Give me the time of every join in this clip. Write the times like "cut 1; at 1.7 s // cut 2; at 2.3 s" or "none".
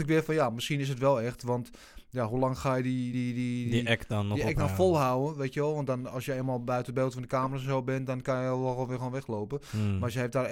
none